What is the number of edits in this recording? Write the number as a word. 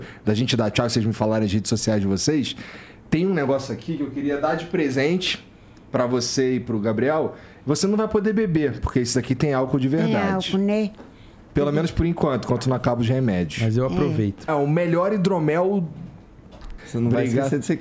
two